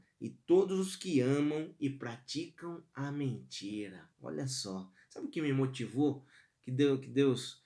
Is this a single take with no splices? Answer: no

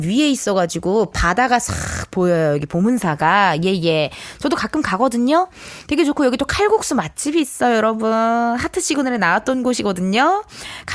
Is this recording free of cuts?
yes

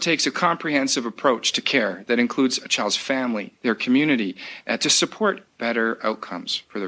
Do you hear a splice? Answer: yes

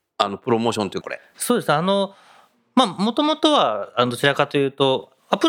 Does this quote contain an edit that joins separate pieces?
yes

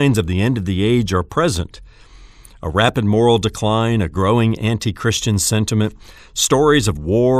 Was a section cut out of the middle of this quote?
no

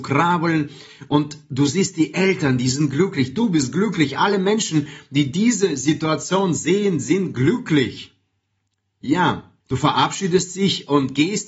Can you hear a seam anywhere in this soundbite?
yes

